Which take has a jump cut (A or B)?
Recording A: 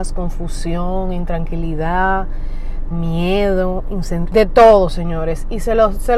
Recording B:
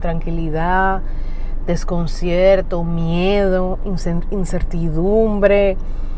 A